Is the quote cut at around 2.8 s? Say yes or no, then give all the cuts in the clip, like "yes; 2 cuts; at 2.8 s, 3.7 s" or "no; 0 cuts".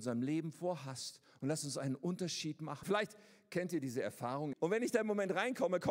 yes; 2 cuts; at 2.8 s, 4.5 s